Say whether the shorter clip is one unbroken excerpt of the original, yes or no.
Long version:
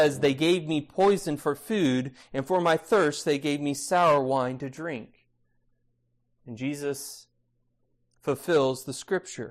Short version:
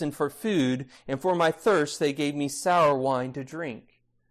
yes